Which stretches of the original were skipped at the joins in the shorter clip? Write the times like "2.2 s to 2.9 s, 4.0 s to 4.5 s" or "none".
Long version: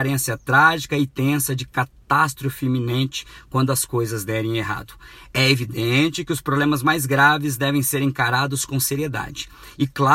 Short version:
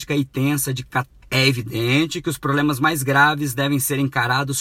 2.0 s to 5.3 s

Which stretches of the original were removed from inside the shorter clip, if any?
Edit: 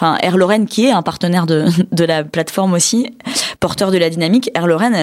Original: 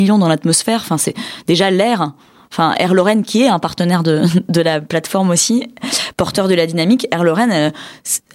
none

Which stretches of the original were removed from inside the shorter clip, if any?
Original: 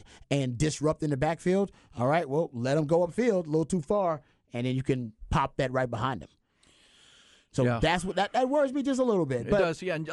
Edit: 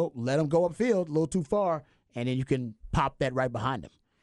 none

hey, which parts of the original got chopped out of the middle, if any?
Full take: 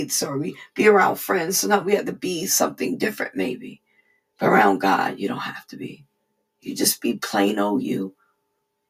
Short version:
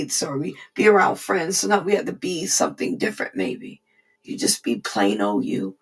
4.2 s to 6.5 s

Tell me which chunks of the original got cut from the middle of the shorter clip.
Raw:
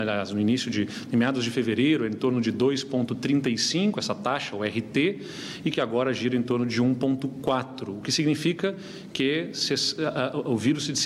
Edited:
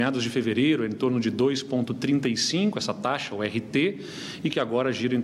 none

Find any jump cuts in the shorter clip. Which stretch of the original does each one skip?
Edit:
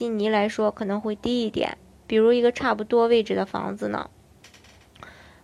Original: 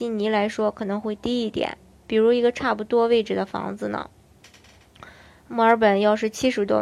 none

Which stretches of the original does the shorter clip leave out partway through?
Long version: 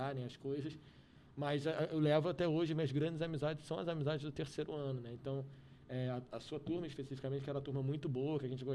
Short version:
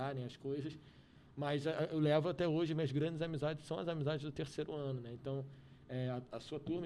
none

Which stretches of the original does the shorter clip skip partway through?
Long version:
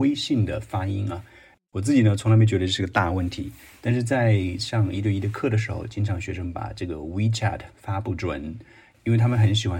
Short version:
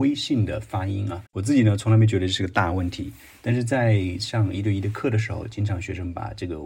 1.3 s to 1.7 s

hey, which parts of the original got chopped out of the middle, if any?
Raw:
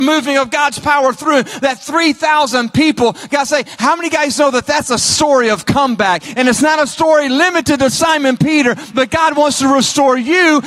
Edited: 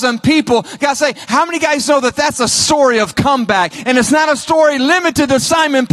none

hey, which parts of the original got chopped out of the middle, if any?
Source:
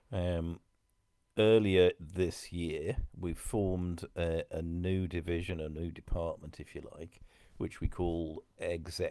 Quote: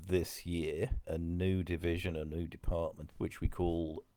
3.1 s to 4.5 s, 6.5 s to 7.5 s

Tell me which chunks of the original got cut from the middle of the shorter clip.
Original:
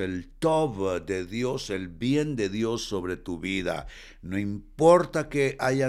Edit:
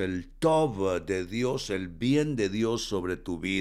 none

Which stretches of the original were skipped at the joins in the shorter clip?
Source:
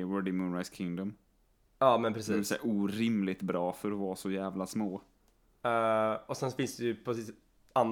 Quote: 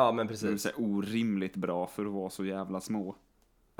none

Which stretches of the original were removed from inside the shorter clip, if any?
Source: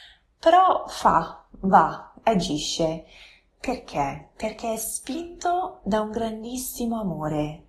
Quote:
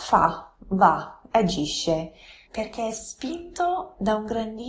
3.4 s to 4.3 s

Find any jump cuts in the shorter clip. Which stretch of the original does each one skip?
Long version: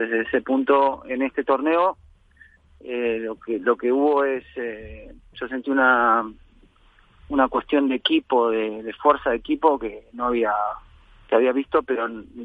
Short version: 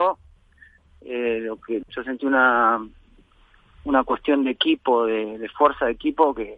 3.6 s to 5.3 s

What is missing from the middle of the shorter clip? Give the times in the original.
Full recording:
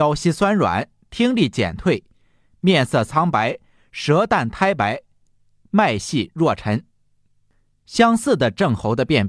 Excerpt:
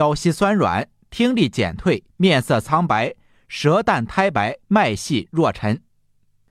2.1 s to 2.5 s, 5.1 s to 5.7 s

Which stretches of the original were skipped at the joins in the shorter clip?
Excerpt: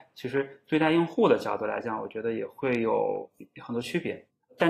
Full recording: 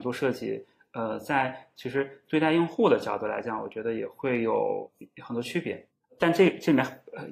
none

